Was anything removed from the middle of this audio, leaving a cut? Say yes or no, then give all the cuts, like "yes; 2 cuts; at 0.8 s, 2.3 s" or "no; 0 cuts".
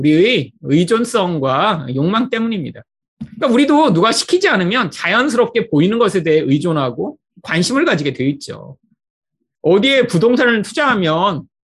yes; 1 cut; at 9.6 s